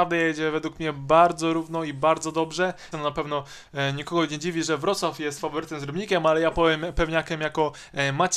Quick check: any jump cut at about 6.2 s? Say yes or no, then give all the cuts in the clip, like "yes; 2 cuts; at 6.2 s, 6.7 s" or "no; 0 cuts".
no; 1 cut; at 2.9 s